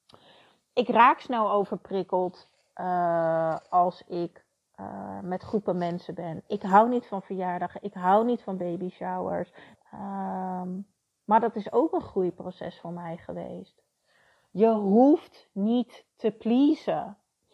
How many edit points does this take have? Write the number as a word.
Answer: one